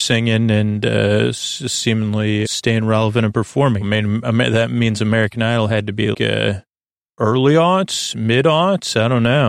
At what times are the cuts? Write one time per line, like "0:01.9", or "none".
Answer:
0:02.4
0:03.8
0:06.1